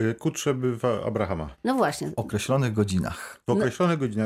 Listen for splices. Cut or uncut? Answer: uncut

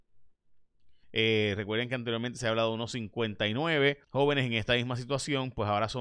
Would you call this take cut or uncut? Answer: cut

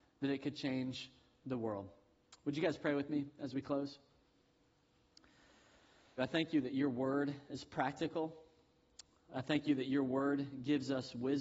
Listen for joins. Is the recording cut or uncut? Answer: cut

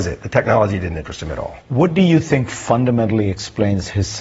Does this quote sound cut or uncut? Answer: cut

